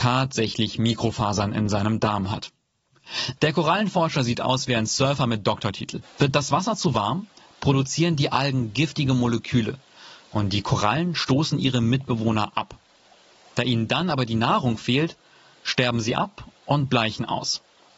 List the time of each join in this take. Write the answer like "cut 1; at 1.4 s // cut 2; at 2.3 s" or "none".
cut 1; at 3.4 s // cut 2; at 6.0 s